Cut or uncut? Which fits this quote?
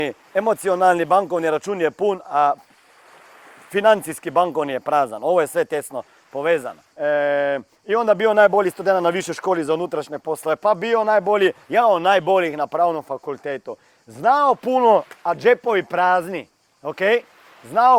cut